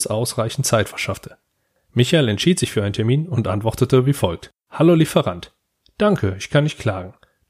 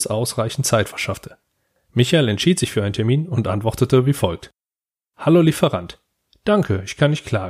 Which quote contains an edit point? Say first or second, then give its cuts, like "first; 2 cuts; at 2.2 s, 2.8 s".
first; 1 cut; at 4.6 s